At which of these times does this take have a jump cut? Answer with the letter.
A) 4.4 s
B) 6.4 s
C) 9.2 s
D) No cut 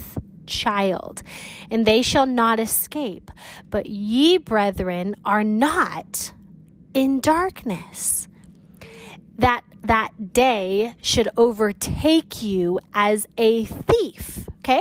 D